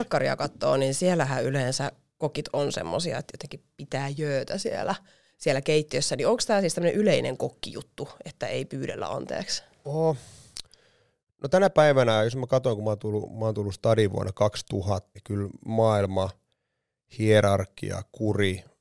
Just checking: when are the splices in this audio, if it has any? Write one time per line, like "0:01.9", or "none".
0:15.2